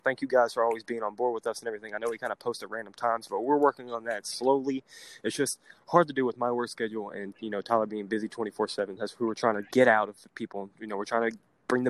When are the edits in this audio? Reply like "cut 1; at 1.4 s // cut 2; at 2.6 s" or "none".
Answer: cut 1; at 9.0 s